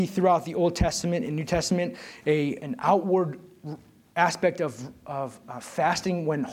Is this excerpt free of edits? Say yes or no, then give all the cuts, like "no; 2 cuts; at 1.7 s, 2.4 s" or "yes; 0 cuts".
no; 1 cut; at 2.6 s